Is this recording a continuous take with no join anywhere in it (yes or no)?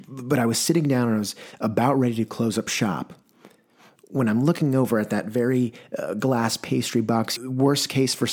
no